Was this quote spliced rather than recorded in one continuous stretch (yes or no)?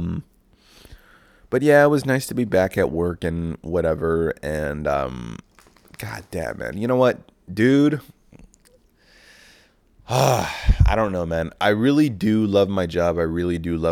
no